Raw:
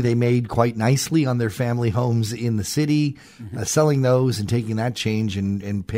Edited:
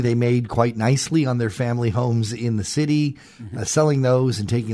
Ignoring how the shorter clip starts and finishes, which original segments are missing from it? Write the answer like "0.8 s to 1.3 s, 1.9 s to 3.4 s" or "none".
none